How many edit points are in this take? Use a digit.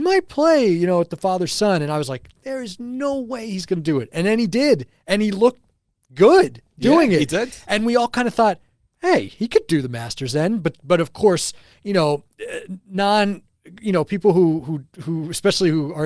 0